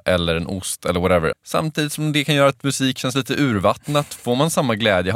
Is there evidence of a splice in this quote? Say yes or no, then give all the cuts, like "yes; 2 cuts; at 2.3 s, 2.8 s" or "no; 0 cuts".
yes; 1 cut; at 1.3 s